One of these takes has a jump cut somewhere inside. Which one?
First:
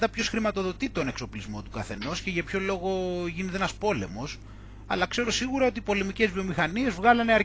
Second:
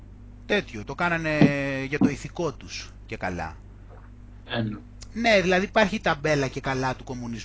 second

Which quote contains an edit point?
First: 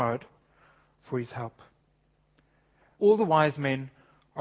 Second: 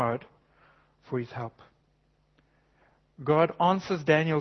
first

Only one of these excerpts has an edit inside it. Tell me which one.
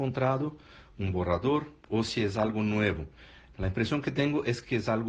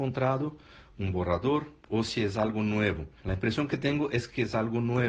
second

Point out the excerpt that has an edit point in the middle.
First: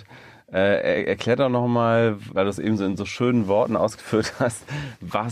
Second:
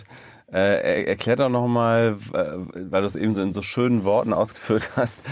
first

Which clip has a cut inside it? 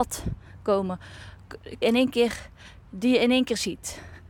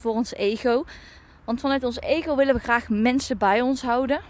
first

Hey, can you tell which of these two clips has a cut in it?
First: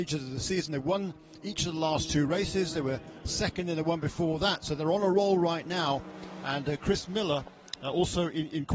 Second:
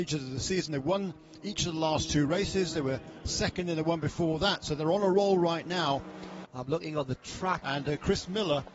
second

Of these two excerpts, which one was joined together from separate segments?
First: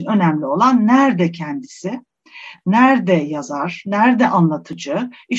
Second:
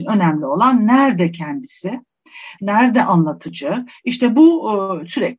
second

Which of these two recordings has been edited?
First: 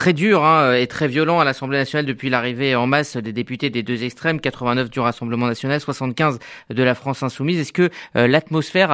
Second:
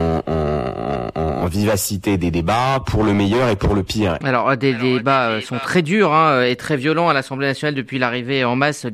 second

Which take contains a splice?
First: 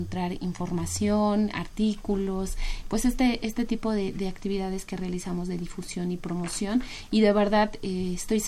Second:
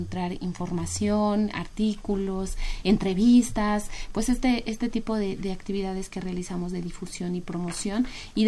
first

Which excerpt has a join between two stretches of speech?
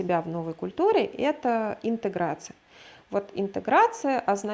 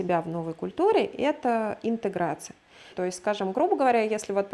second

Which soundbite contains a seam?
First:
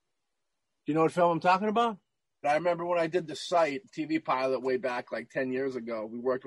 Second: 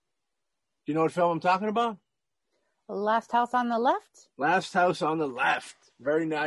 first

